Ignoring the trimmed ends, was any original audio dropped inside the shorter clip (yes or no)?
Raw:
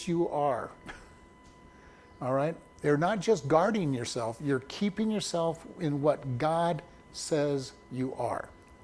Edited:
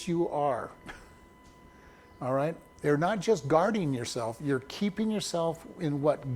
no